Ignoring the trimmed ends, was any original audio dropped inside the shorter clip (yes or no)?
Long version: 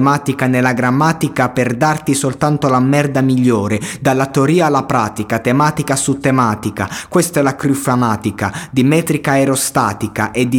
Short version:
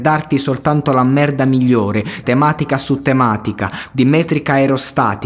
yes